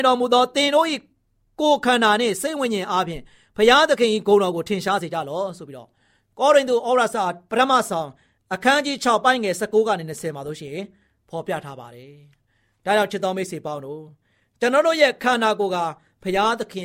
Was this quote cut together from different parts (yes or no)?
no